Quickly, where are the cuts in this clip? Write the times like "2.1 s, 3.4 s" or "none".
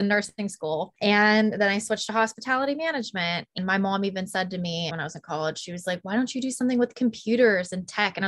4.9 s